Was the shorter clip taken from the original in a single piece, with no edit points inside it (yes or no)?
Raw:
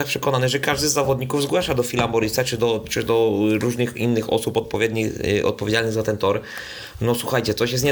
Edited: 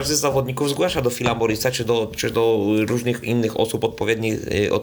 yes